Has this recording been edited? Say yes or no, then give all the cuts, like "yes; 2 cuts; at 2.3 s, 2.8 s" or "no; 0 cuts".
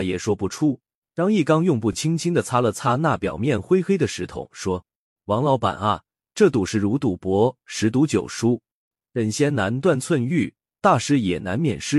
no; 0 cuts